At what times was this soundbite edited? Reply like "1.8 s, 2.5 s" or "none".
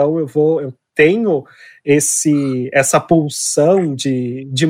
none